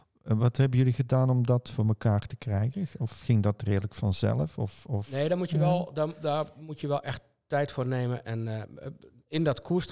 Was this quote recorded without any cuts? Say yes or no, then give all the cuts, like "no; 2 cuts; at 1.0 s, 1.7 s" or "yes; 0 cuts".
yes; 0 cuts